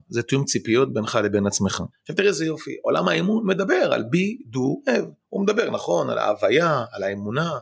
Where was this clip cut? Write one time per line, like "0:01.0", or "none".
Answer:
0:01.9